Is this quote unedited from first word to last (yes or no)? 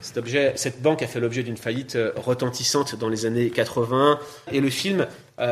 no